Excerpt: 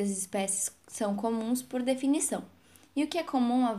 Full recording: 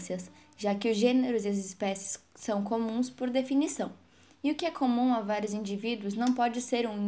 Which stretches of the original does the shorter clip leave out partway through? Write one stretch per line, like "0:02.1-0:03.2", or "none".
none